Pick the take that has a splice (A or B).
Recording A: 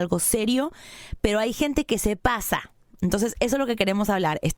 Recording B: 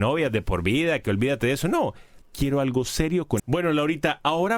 B